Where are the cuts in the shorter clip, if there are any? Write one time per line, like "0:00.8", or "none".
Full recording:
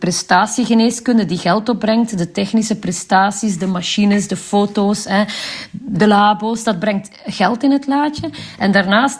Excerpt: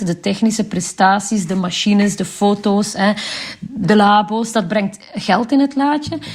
none